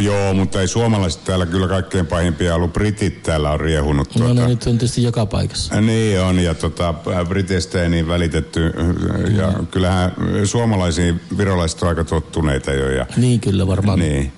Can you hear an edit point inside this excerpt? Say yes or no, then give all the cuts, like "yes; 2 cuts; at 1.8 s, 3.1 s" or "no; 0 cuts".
no; 0 cuts